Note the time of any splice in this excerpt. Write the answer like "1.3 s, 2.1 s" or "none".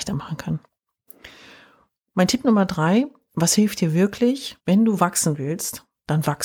4.6 s